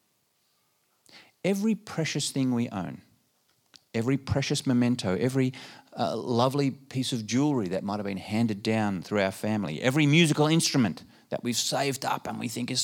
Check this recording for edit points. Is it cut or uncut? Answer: uncut